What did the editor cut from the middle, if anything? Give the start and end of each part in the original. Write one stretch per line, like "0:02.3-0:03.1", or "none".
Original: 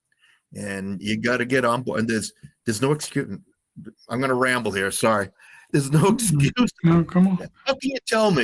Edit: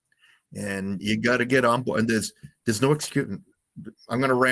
none